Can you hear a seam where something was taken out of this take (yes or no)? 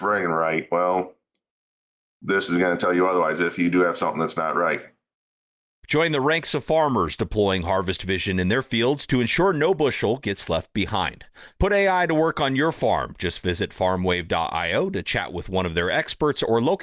no